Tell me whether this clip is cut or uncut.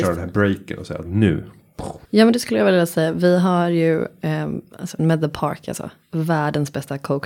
cut